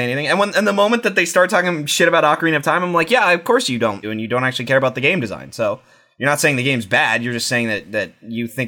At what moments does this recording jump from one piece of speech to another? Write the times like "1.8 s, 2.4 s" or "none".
4.0 s